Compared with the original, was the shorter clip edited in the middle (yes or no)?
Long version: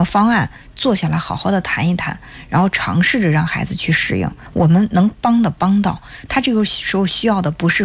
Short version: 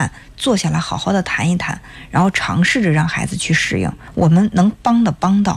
no